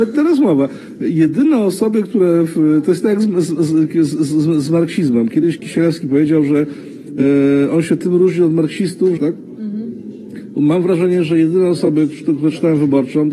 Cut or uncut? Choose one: cut